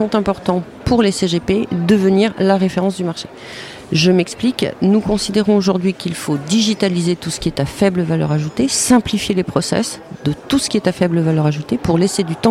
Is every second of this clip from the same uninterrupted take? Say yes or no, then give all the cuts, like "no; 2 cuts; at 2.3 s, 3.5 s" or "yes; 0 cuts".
yes; 0 cuts